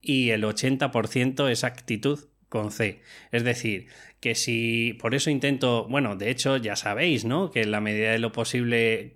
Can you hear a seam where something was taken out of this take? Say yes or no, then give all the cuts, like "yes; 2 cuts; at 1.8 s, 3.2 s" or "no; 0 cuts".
no; 0 cuts